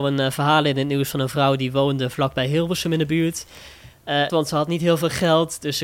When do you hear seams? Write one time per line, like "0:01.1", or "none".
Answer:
0:04.3